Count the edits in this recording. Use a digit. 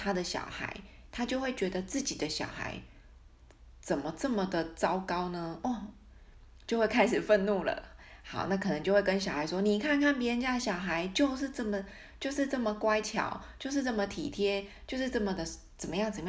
0